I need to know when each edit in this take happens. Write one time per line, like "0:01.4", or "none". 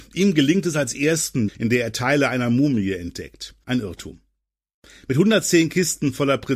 0:01.5
0:03.6